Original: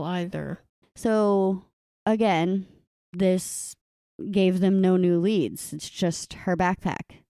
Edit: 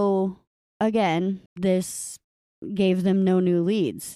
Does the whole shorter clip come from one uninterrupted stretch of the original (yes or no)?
no